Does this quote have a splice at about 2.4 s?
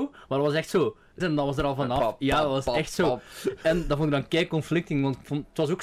no; 1 cut; at 1.2 s

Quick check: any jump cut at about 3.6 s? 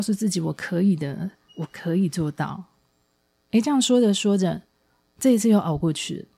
no; 1 cut; at 1.5 s

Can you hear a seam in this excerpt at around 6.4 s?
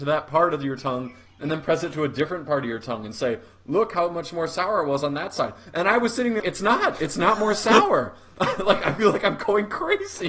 yes; 1 cut; at 6.4 s

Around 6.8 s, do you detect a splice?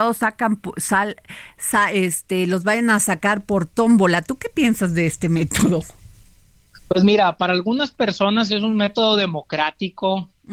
no; 0 cuts

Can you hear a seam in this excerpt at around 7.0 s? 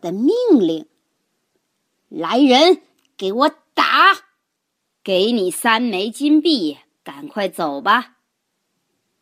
yes; 2 cuts; at 5.0 s, 7.0 s

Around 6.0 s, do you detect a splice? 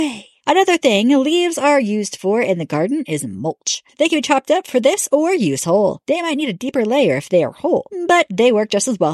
no; 0 cuts

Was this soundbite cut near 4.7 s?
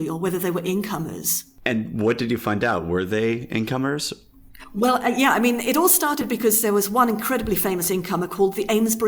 no; 0 cuts

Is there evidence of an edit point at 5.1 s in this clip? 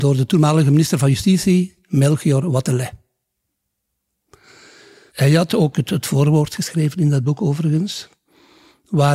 yes; 1 cut; at 5.1 s

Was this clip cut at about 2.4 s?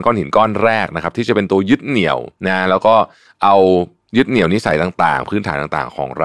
yes; 1 cut; at 2.4 s

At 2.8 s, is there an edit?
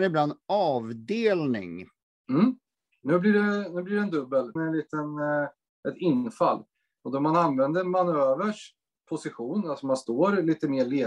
no; 2 cuts; at 4.6 s, 7.0 s

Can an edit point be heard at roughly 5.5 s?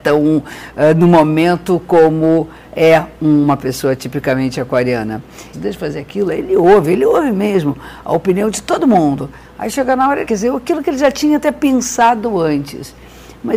yes; 2 cuts; at 5.5 s, 10.2 s

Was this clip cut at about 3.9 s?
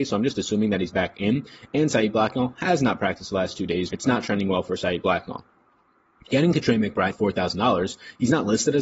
yes; 2 cuts; at 3.9 s, 7.1 s

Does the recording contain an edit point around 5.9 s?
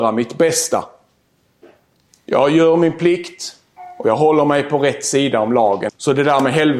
yes; 2 cuts; at 2.1 s, 5.9 s

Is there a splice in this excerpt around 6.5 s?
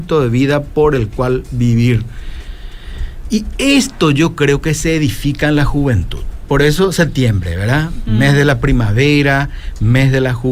no; 0 cuts

